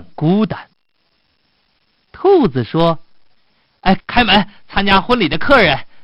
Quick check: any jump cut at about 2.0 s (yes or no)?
no